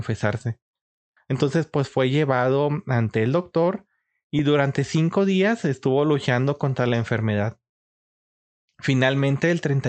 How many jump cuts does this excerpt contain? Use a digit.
1